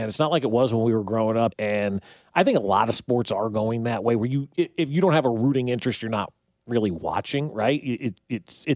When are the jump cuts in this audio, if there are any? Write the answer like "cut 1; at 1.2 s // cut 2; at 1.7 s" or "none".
cut 1; at 1.5 s